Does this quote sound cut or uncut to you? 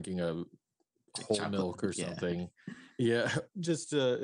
uncut